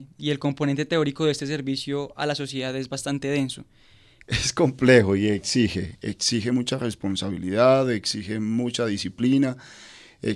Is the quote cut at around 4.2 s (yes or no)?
yes